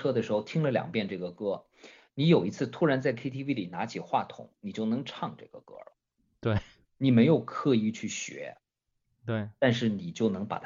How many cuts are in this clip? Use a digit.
0